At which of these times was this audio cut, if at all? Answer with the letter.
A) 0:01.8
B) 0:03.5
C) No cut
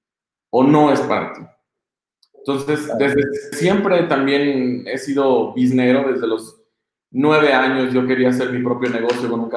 B